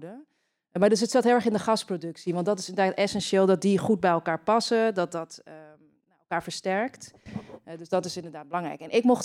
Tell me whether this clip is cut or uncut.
uncut